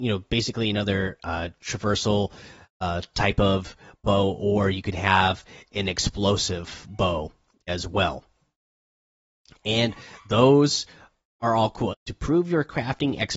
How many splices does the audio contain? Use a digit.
1